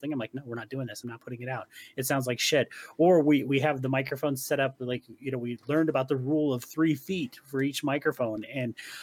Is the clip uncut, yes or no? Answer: yes